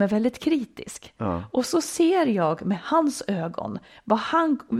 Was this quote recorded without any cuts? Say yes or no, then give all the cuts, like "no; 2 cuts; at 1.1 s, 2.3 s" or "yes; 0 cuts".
yes; 0 cuts